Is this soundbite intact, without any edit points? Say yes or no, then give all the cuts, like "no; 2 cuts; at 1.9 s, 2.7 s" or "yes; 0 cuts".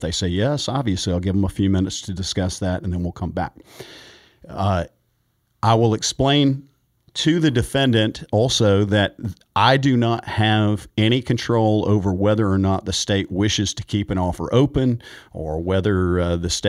yes; 0 cuts